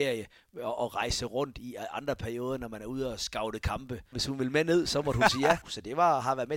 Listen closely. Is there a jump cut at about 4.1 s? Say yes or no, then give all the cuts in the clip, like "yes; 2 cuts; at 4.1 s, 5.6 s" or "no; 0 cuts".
yes; 2 cuts; at 4.1 s, 5.6 s